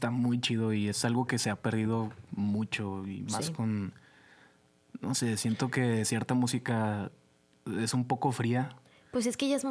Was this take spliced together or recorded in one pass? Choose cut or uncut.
uncut